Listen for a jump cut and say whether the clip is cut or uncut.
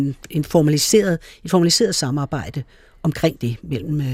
uncut